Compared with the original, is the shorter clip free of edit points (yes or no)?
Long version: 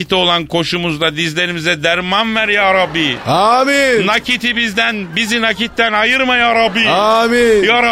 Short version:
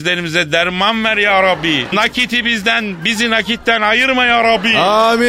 no